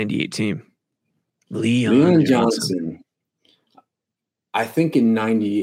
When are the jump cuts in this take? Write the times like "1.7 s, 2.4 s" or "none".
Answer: 1.3 s